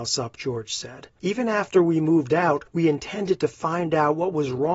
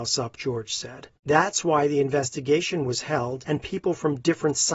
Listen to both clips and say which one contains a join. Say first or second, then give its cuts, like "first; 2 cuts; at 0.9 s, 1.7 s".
second; 1 cut; at 1.2 s